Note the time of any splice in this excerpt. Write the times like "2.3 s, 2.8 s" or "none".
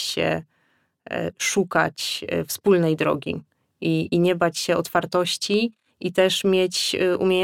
none